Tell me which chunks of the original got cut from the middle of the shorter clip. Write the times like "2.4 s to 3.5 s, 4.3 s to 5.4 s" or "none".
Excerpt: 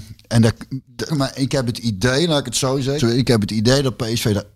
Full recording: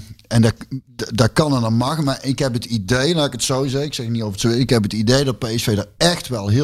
1.1 s to 2.0 s, 3.8 s to 4.4 s